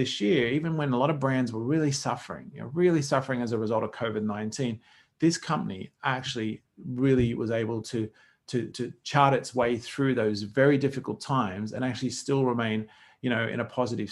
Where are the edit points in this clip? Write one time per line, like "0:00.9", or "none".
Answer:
0:08.7